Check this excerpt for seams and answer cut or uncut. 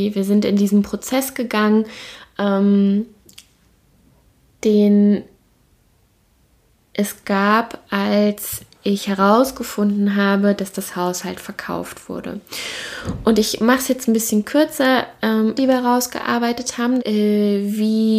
cut